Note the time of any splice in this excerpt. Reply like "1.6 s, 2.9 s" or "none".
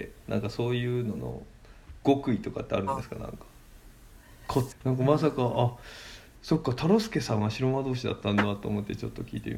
4.7 s